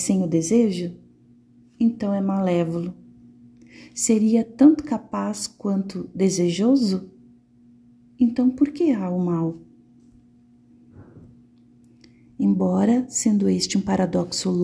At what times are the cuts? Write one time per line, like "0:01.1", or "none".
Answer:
none

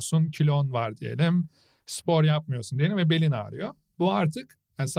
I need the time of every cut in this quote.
0:03.9

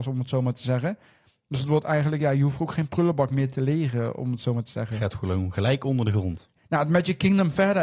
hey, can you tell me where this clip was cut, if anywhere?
none

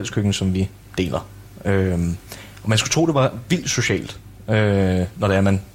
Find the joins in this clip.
none

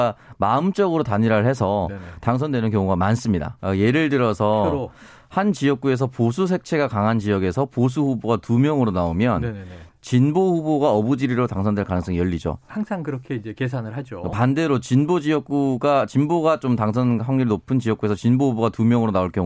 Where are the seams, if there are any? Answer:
0:03.6

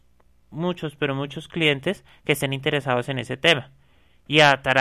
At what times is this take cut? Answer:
none

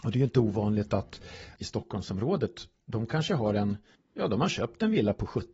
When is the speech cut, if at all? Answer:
0:01.5

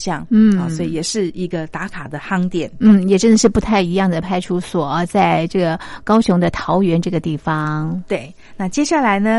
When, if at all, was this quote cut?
none

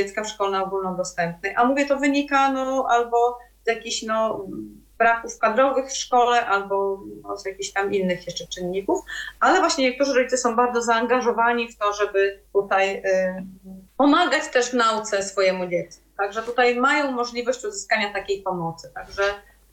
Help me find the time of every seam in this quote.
0:12.5
0:13.9

